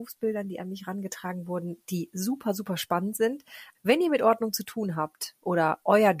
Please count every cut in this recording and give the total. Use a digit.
1